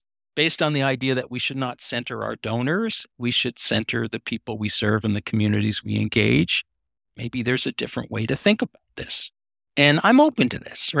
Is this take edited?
yes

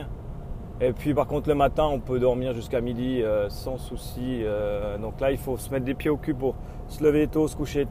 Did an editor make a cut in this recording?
no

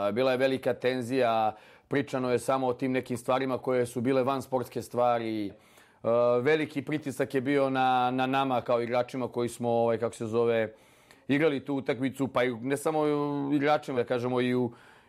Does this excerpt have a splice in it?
yes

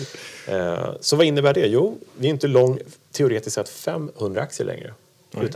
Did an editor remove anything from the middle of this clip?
no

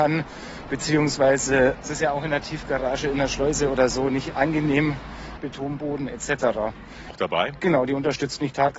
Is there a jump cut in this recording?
yes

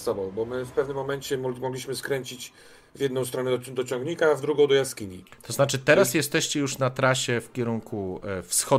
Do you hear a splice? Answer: no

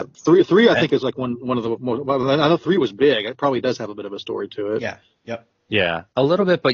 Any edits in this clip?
no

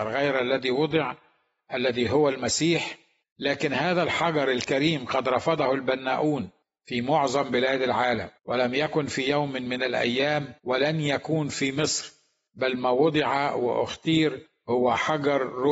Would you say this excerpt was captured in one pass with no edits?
no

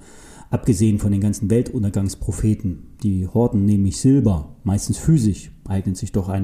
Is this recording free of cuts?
yes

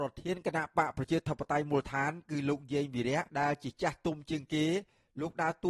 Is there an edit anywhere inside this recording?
yes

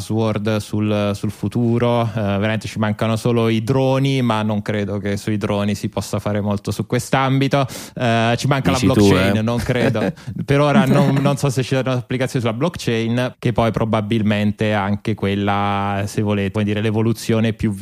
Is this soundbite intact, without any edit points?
no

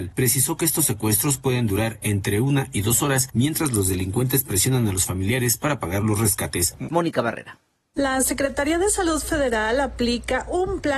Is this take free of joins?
no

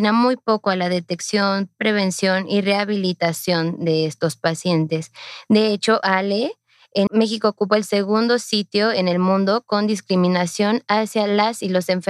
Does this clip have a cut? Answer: yes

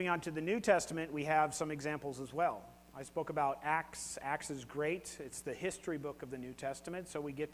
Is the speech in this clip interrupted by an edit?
no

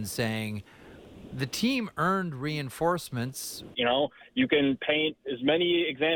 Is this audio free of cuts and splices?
no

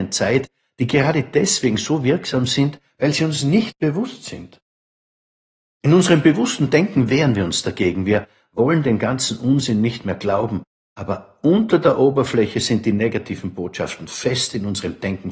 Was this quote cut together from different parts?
no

